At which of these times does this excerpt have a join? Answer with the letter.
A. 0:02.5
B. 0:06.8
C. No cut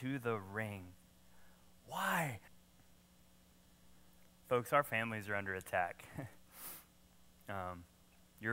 A